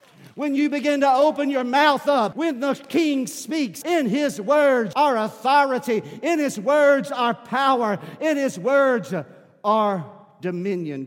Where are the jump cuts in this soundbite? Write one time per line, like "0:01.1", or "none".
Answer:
0:02.3
0:03.8
0:04.9